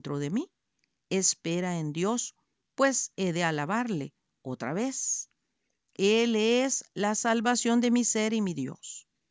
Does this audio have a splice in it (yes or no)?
no